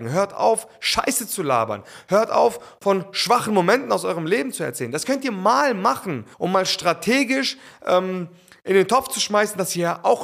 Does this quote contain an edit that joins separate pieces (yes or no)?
yes